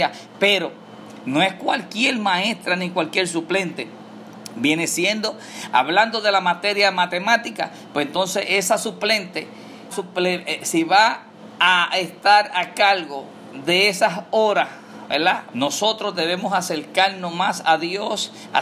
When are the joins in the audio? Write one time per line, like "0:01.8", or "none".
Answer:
0:09.9
0:15.5

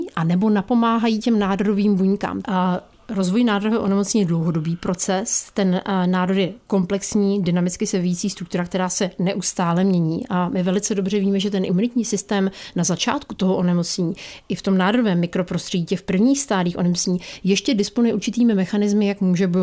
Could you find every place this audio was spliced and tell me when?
0:02.4

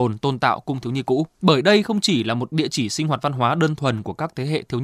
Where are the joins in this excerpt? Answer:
0:01.3

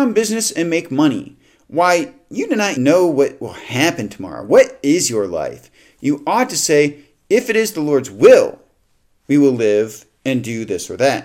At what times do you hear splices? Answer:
0:02.8

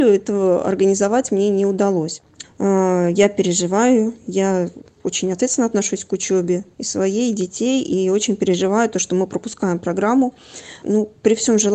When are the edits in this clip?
0:02.4
0:10.8

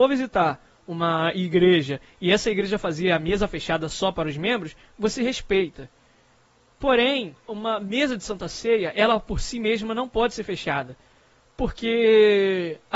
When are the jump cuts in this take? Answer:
0:07.5

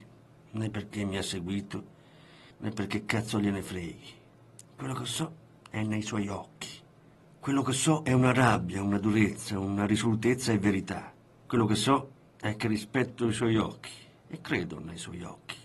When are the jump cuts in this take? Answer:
none

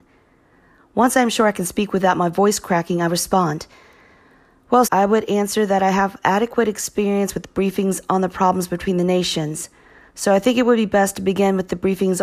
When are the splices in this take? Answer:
0:04.8

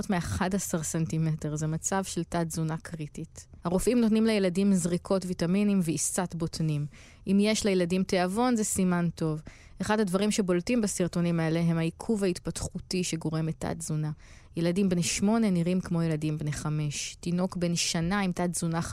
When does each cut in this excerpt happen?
0:03.6

